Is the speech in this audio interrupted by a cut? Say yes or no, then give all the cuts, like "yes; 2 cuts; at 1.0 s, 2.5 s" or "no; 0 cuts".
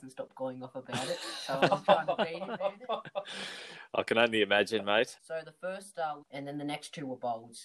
yes; 2 cuts; at 5.2 s, 6.2 s